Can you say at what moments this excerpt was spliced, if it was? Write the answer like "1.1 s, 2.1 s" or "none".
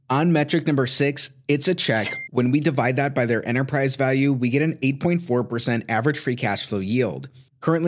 2.3 s